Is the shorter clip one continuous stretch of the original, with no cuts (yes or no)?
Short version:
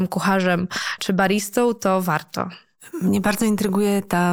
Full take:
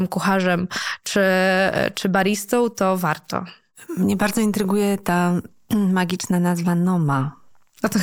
no